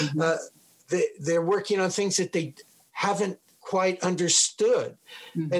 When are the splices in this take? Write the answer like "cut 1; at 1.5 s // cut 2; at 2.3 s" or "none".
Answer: none